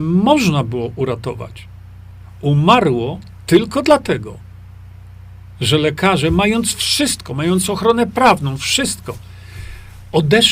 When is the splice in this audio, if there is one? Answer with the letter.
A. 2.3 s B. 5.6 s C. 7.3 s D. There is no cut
D